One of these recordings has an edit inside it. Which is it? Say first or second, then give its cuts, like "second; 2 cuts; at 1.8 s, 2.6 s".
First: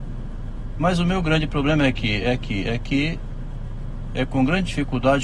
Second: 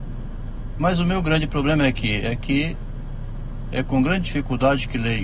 second; 1 cut; at 2.2 s